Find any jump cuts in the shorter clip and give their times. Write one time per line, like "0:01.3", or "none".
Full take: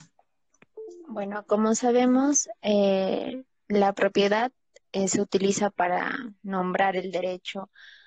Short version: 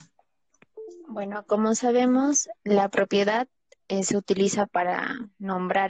0:02.5